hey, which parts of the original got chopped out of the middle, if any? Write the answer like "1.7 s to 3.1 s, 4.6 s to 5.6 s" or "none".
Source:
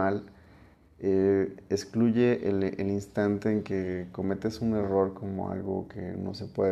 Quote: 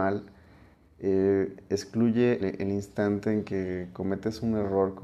2.4 s to 2.6 s